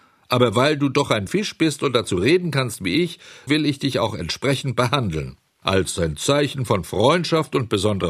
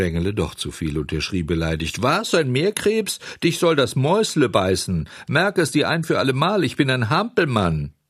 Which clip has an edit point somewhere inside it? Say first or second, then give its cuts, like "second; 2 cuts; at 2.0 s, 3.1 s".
first; 2 cuts; at 3.5 s, 5.6 s